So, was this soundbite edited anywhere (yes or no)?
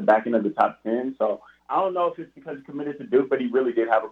yes